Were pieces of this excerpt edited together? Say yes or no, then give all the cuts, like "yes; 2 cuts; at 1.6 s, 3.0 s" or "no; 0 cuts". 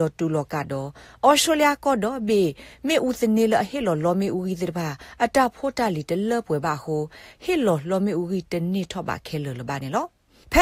no; 0 cuts